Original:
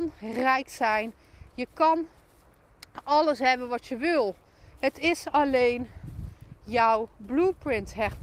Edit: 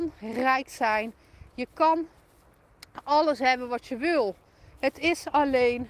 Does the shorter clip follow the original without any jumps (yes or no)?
yes